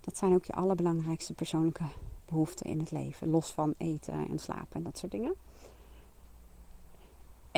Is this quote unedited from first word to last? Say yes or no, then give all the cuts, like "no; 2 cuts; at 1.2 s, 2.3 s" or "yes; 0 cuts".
yes; 0 cuts